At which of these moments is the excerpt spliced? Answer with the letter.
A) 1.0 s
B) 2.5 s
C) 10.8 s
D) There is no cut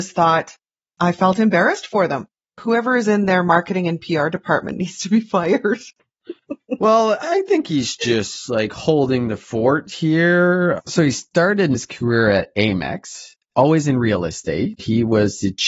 A